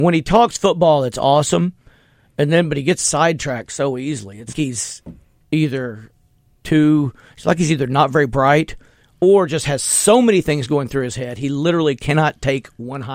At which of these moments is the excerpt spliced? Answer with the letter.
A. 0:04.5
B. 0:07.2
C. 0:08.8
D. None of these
A